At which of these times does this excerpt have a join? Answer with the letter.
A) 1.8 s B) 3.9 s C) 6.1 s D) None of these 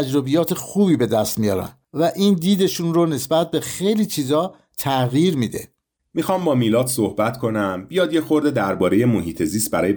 A